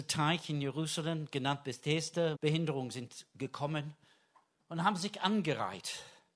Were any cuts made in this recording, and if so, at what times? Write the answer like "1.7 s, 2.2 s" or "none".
2.3 s